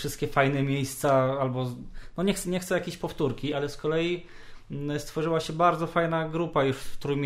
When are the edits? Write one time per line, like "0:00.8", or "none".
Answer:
none